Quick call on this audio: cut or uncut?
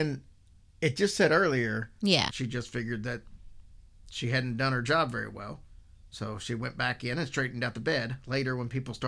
cut